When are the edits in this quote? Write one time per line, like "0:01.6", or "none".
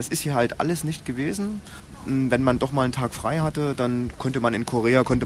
none